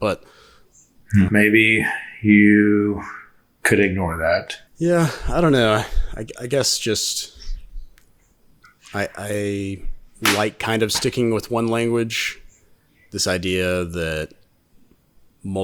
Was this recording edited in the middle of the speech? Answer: yes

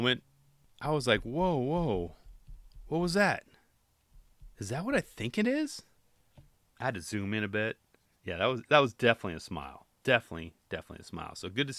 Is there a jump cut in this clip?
no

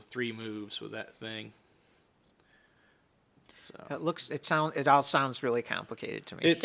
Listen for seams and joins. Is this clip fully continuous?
yes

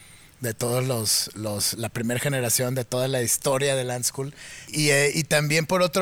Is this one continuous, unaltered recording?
no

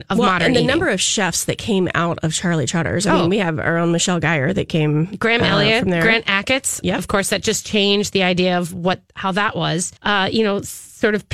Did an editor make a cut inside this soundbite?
yes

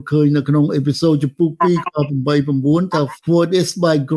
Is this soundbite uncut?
no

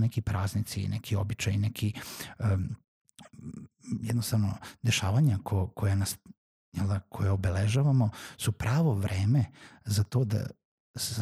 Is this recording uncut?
yes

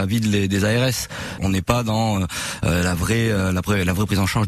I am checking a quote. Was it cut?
yes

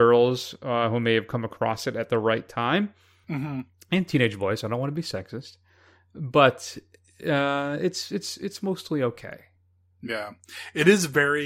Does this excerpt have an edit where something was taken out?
no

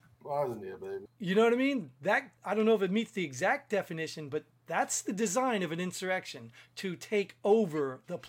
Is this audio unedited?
no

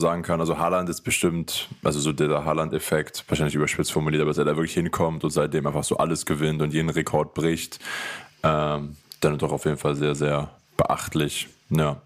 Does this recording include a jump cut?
no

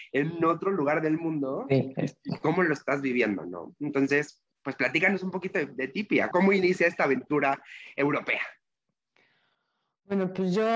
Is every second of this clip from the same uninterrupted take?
no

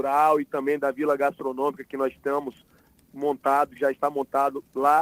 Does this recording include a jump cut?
no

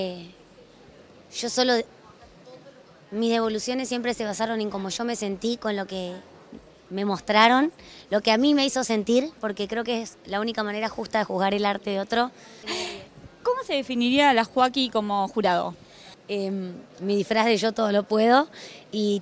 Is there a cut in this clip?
yes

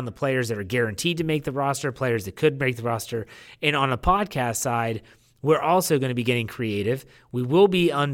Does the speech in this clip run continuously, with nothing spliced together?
yes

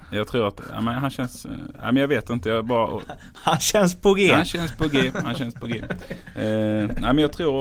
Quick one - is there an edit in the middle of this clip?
no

